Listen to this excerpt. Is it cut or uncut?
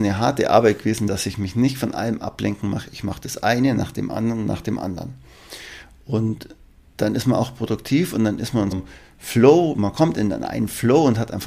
cut